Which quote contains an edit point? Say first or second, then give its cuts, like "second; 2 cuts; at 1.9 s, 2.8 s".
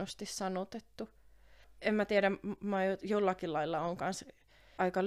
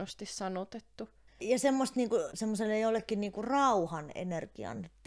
second; 2 cuts; at 1.3 s, 2.3 s